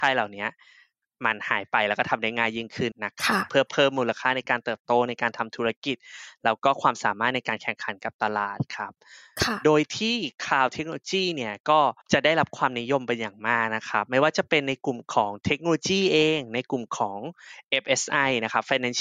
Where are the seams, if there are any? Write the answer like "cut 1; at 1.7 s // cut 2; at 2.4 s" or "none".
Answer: cut 1; at 2.9 s // cut 2; at 12.0 s